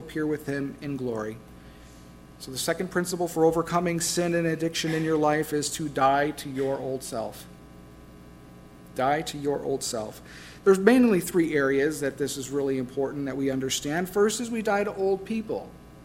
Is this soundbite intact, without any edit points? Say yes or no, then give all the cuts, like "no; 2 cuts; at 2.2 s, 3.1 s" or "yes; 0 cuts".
yes; 0 cuts